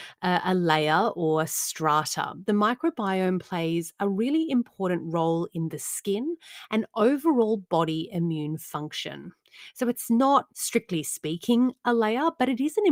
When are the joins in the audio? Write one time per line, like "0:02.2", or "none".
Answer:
0:10.5